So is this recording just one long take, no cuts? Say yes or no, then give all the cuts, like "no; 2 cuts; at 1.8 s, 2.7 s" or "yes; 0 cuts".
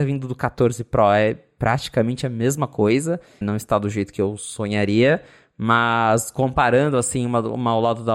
no; 1 cut; at 3.4 s